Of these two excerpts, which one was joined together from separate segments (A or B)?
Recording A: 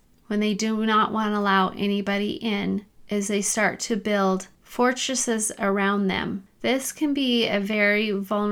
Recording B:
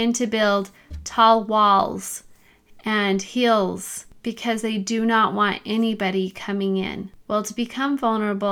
A